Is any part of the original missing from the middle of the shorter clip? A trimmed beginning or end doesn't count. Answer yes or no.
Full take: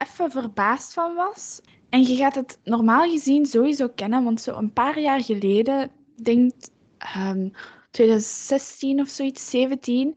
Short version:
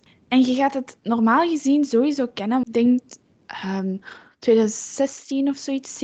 yes